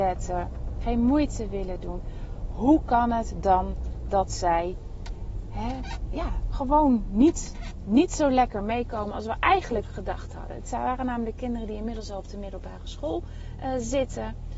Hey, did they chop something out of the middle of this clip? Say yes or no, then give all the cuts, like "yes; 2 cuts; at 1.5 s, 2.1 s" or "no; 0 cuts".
no; 0 cuts